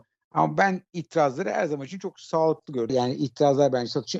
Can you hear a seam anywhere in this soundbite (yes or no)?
yes